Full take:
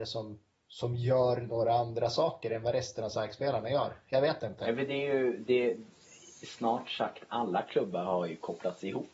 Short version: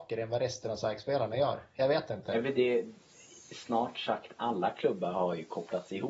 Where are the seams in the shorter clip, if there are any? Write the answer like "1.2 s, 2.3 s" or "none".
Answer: 2.5 s

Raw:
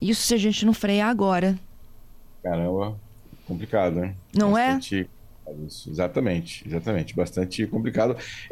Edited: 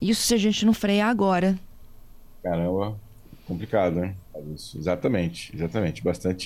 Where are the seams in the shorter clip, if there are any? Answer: 4.2 s

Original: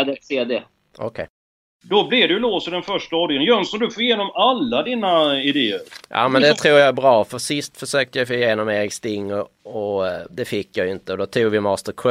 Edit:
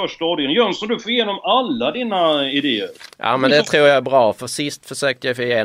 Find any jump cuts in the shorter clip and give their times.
none

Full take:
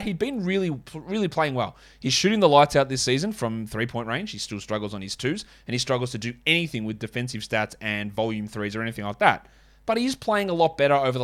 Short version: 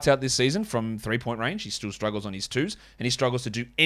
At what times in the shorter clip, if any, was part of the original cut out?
none

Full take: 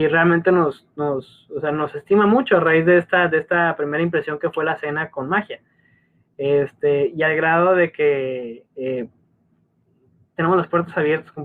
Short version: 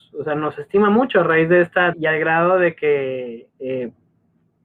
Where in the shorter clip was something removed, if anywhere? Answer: 1.9 s

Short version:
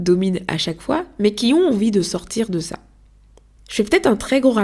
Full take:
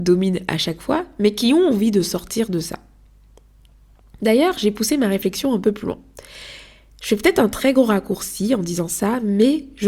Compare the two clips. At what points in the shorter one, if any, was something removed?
3.6 s

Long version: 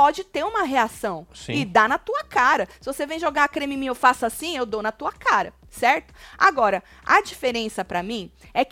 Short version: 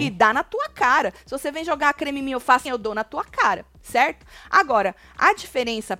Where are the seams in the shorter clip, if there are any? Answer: 2.7 s

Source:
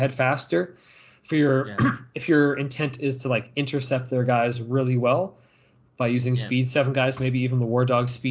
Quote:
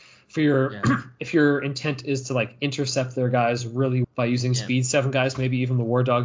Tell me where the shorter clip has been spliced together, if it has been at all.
4.0 s

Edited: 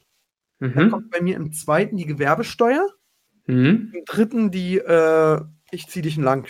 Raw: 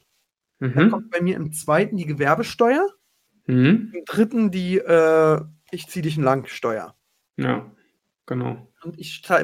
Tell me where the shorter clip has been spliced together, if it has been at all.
none

